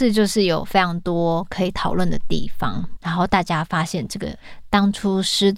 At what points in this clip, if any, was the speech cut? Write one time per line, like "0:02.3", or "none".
0:03.0